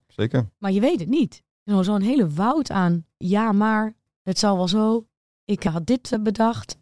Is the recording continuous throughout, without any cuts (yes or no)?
yes